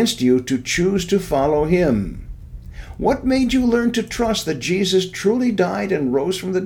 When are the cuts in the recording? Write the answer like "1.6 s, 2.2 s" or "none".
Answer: none